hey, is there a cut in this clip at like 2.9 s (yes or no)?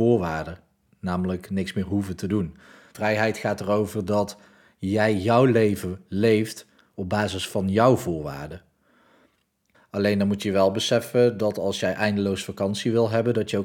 yes